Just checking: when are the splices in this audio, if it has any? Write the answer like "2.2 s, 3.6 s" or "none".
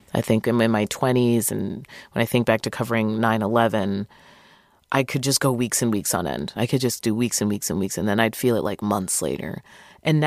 6.6 s